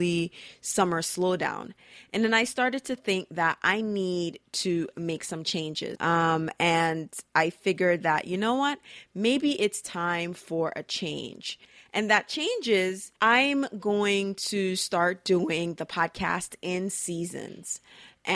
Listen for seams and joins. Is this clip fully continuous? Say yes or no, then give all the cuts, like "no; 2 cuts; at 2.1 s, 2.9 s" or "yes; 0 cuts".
no; 2 cuts; at 5.9 s, 13.2 s